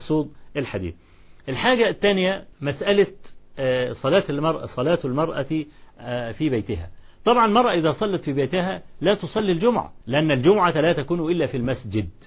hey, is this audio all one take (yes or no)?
no